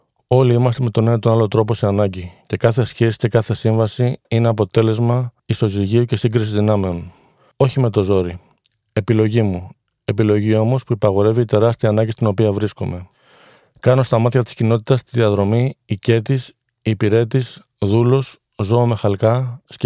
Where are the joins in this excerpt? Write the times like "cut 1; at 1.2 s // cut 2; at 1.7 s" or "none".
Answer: cut 1; at 5.4 s // cut 2; at 7.5 s